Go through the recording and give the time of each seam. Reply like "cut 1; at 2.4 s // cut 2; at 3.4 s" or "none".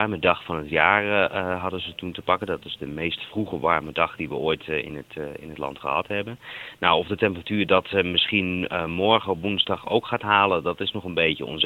none